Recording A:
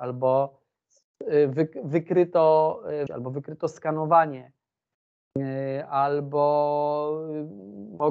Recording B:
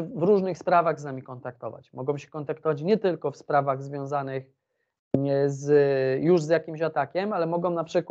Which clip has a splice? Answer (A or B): A